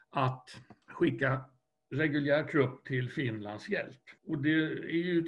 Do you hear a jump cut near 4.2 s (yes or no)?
yes